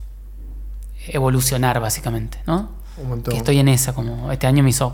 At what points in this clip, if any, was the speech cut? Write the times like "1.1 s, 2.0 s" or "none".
1.1 s

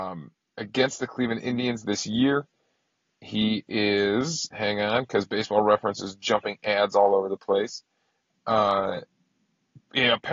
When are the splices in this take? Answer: 8.3 s

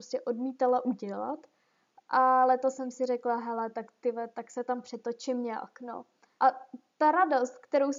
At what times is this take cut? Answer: 6.4 s

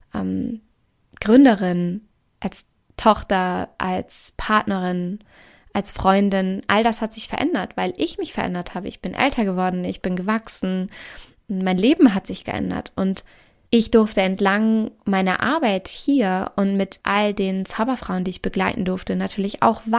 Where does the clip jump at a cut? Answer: none

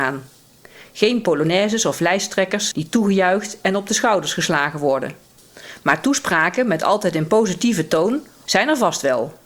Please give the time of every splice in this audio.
8.5 s

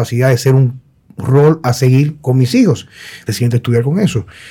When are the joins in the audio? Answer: 3.3 s

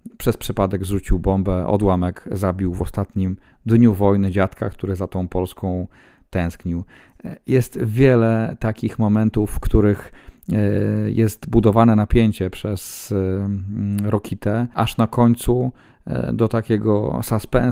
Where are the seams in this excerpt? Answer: none

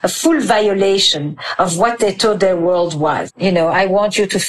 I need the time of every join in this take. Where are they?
3.3 s

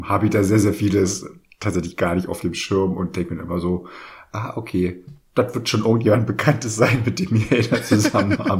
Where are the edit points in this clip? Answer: none

